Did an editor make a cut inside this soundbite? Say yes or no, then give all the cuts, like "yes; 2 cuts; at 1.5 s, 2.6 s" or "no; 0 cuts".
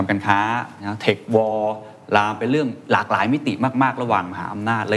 no; 0 cuts